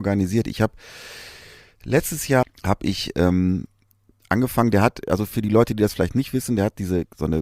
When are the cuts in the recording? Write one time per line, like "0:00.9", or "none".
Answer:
0:02.4